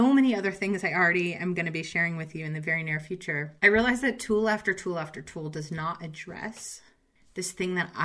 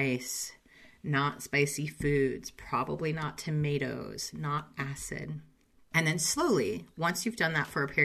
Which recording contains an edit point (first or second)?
first